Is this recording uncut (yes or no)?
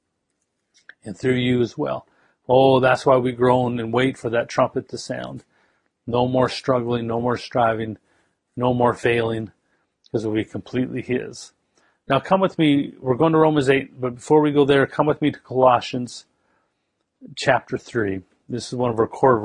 yes